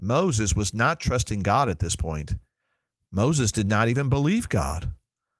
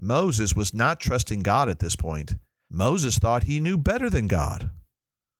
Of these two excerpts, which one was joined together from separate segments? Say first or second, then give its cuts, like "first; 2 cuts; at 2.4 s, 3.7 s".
second; 1 cut; at 2.7 s